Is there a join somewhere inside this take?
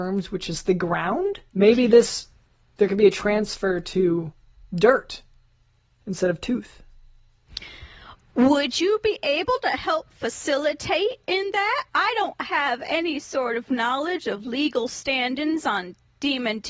yes; 2 cuts; at 1.5 s, 11.9 s

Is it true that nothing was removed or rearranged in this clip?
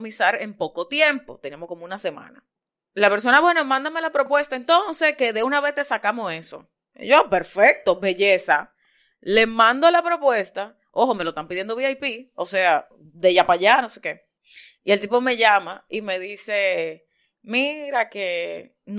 yes; 0 cuts

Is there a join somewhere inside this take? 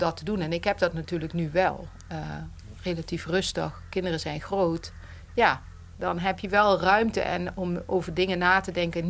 yes; 1 cut; at 5.9 s

